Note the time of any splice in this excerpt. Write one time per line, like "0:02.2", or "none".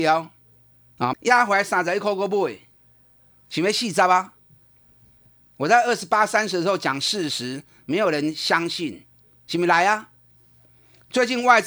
0:01.1
0:03.3